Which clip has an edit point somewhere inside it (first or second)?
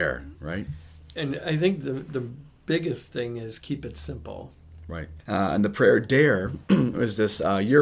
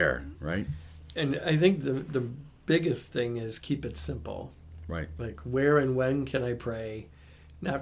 first